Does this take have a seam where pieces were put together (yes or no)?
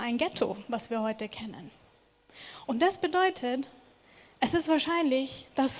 no